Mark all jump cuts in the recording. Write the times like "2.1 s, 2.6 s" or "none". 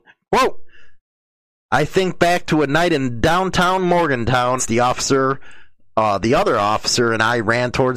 4.6 s